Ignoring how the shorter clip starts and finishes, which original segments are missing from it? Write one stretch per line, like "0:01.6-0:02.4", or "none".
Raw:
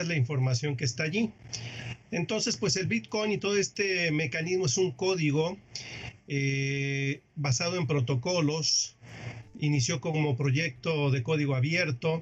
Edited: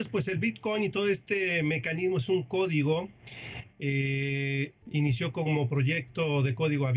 0:07.3-0:09.5